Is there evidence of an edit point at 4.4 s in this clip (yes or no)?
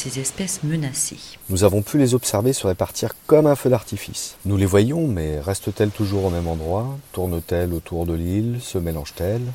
yes